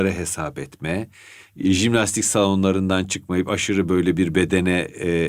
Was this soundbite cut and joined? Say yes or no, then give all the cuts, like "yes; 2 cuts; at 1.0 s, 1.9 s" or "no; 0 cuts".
no; 0 cuts